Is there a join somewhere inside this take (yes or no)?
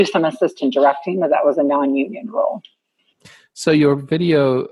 no